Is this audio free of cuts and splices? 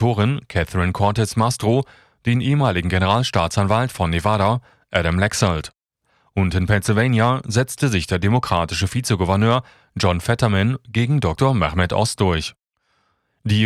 yes; 0 cuts

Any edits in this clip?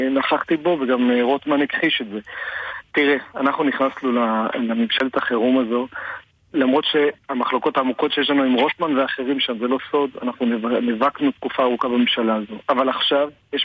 no; 0 cuts

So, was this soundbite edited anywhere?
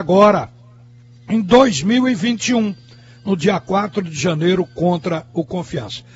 no; 0 cuts

